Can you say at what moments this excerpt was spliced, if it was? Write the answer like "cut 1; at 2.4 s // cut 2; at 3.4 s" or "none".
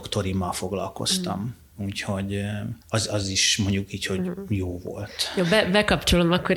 cut 1; at 2.8 s